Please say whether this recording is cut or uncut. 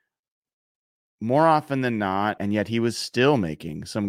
cut